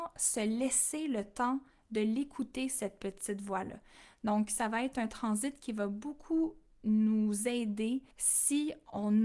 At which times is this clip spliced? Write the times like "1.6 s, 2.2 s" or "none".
8.1 s